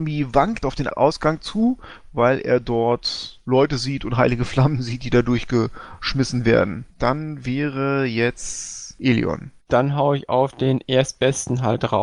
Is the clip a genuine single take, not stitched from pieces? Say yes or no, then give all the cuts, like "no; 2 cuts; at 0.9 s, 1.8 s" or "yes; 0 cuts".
no; 2 cuts; at 6.9 s, 9.6 s